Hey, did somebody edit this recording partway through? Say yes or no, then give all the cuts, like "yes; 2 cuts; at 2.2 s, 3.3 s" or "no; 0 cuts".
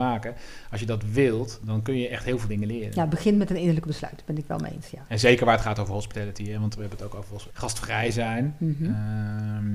yes; 2 cuts; at 5.1 s, 7.5 s